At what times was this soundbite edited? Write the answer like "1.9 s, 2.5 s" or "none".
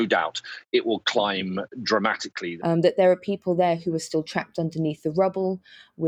2.6 s